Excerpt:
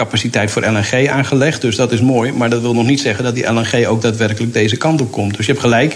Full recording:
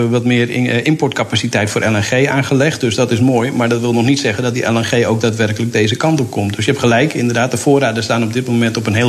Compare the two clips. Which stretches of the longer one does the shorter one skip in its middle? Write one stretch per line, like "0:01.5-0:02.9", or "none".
none